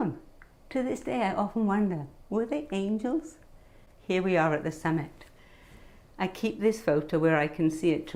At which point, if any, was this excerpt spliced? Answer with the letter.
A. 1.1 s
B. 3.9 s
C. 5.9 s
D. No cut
B